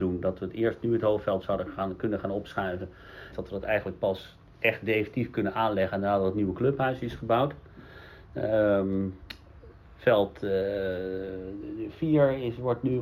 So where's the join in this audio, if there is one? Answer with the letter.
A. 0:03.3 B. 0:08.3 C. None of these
A